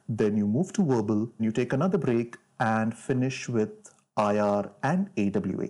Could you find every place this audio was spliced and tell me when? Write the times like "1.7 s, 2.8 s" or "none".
1.4 s